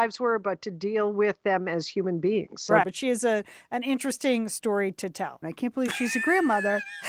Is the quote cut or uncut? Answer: cut